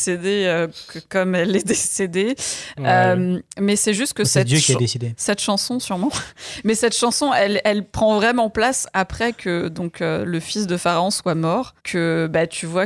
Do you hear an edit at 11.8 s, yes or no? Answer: yes